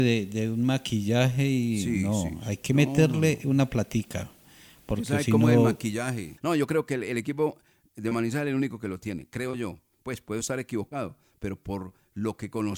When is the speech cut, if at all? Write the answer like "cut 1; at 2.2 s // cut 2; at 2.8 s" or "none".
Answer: cut 1; at 6.4 s